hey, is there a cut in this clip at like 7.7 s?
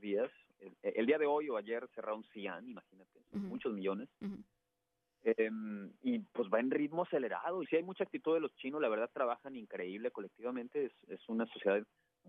yes; 1 cut; at 7.7 s

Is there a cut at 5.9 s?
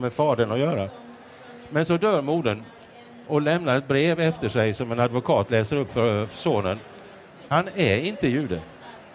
yes; 2 cuts; at 5.9 s, 7.5 s

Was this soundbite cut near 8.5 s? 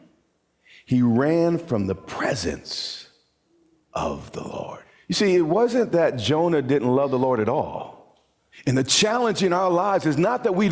yes; 1 cut; at 8.5 s

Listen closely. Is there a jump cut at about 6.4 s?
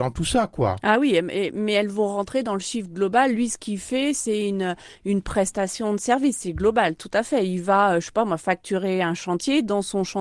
no; 0 cuts

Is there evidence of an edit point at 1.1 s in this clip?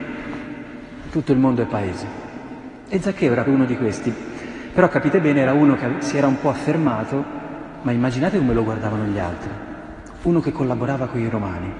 no; 1 cut; at 3.4 s

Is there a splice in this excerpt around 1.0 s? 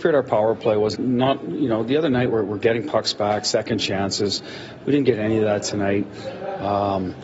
yes; 1 cut; at 1.0 s

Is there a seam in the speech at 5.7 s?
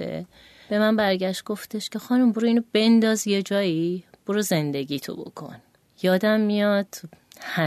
no; 0 cuts

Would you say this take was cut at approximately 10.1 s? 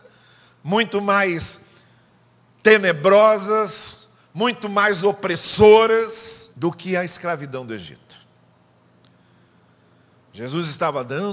no; 1 cut; at 6.5 s

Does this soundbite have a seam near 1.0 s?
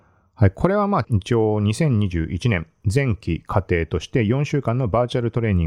yes; 1 cut; at 1.0 s

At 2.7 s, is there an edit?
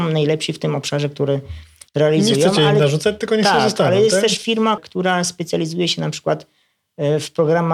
no; 1 cut; at 4.8 s

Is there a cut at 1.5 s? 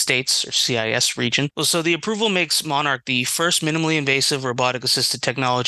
yes; 1 cut; at 1.5 s

